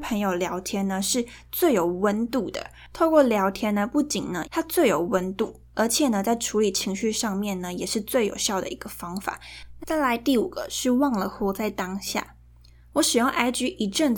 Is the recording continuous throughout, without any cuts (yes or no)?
no